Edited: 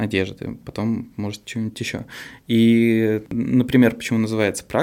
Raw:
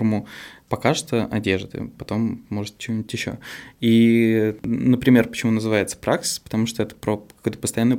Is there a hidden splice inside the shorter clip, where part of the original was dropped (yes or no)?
no